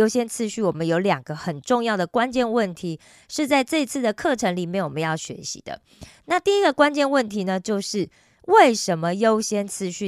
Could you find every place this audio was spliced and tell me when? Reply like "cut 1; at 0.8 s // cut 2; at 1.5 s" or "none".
none

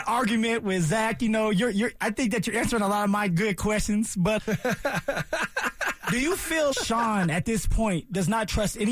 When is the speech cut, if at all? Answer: cut 1; at 4.4 s // cut 2; at 6.7 s

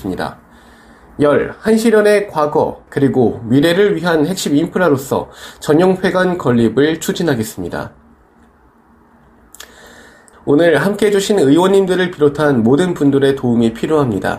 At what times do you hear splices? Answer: cut 1; at 2.9 s // cut 2; at 10.3 s

